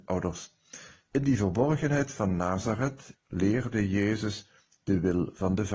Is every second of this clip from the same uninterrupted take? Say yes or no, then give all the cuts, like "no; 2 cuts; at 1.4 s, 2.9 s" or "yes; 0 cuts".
no; 1 cut; at 3.1 s